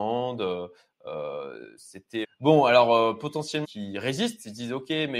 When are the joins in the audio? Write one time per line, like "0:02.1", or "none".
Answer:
0:02.2
0:03.6